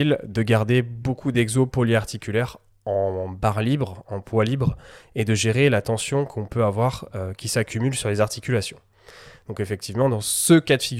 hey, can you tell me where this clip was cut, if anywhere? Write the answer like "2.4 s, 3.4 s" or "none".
none